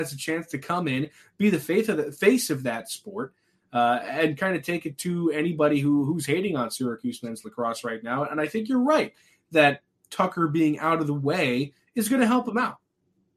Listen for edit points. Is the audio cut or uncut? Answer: uncut